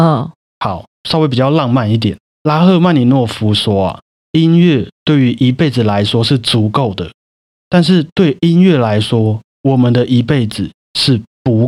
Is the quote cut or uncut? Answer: cut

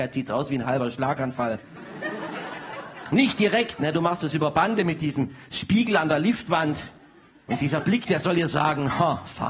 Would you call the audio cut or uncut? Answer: uncut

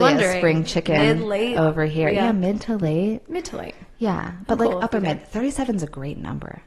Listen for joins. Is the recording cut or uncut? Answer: uncut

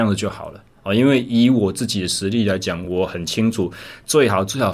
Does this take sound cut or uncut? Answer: uncut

